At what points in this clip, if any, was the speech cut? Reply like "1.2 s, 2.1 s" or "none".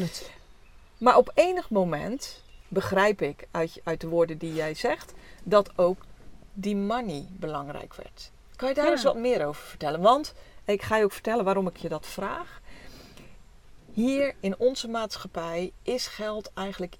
2.6 s